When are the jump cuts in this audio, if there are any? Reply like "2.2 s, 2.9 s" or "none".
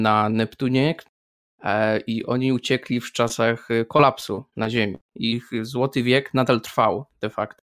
5.1 s